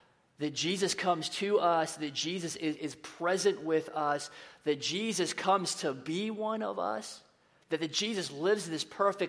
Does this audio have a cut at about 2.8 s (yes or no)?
yes